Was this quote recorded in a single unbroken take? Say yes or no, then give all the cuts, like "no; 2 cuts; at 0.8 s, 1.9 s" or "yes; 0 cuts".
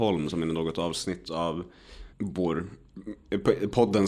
no; 1 cut; at 2.1 s